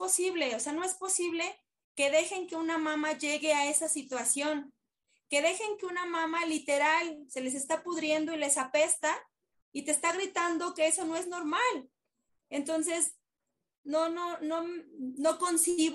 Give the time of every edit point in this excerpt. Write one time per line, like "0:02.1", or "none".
none